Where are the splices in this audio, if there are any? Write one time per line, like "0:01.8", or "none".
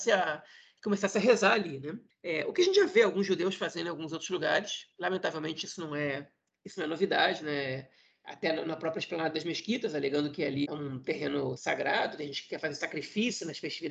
0:10.6